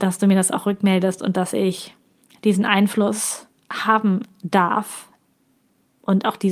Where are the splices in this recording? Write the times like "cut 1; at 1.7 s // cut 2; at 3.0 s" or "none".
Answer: none